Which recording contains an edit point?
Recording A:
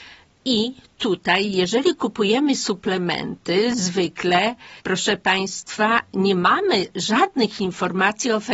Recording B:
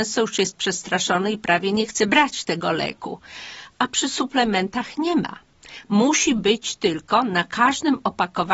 A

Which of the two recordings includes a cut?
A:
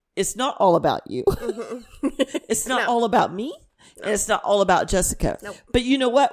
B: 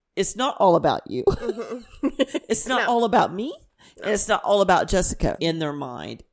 B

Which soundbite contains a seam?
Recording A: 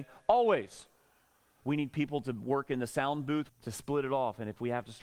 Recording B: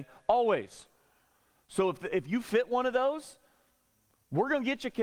A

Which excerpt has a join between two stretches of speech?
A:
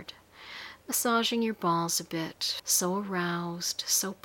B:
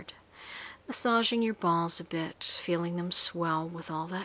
A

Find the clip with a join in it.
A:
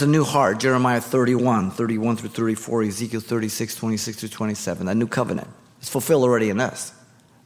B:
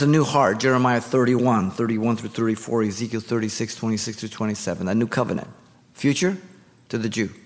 B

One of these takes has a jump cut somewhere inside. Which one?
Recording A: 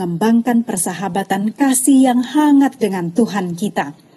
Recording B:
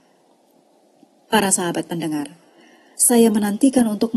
B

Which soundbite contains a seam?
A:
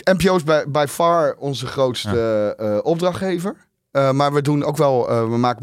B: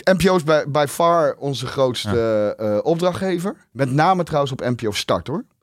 B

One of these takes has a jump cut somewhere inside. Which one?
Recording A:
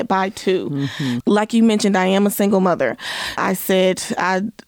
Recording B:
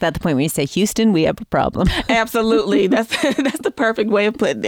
A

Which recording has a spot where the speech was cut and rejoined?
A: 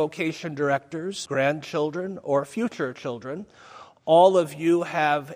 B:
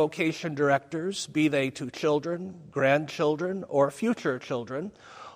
A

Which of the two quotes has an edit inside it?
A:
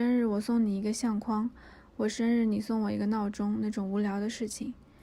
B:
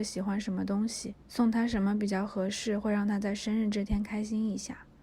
B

